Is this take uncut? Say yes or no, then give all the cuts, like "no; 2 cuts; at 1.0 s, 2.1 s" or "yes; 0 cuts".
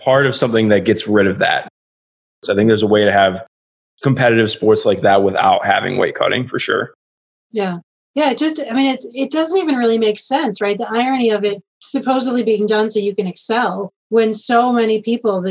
no; 2 cuts; at 11.7 s, 14.0 s